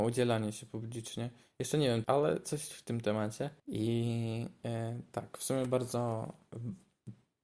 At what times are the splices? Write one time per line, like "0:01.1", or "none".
0:02.0
0:03.6